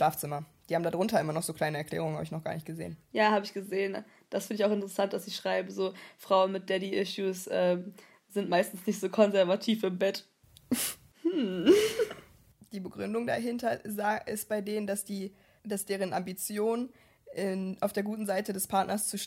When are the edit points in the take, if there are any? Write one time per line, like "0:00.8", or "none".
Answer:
none